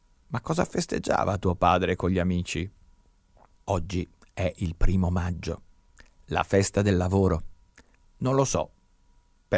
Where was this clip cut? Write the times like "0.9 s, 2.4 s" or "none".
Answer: 3.5 s, 8.0 s

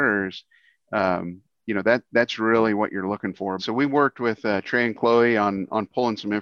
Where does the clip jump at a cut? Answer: 3.6 s

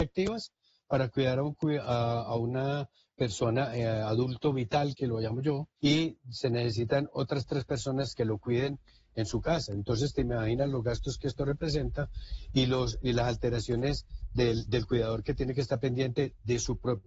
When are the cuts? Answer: 5.8 s

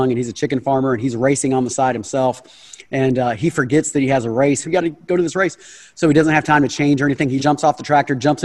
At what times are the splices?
4.6 s, 7.4 s

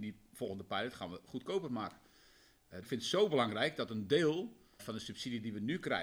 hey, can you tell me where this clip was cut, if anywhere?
2.8 s, 4.8 s

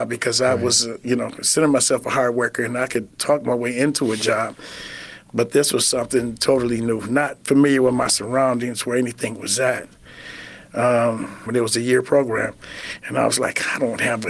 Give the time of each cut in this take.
7.4 s, 11.5 s

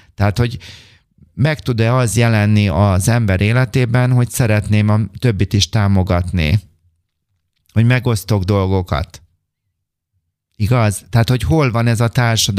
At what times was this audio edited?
none

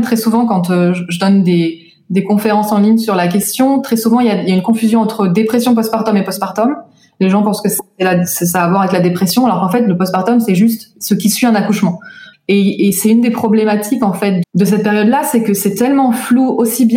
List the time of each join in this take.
12.3 s, 14.4 s

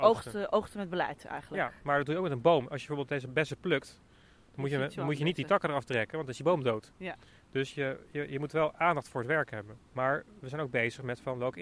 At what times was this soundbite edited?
9.9 s

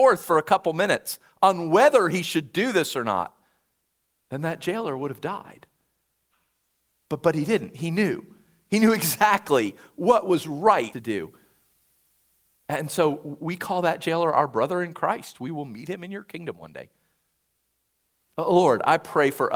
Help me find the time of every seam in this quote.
10.9 s

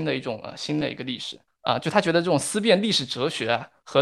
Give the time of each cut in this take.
1.5 s

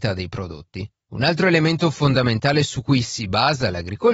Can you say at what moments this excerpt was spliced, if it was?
none

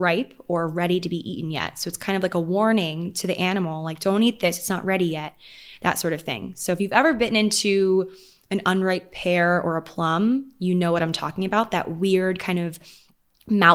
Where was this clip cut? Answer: none

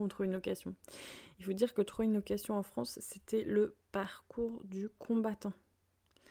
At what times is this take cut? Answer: none

